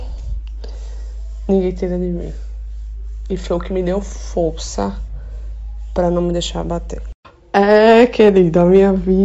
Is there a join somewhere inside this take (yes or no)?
no